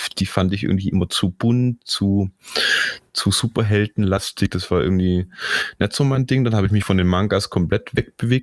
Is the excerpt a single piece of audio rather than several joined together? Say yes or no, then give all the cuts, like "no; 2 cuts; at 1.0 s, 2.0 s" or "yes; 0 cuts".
yes; 0 cuts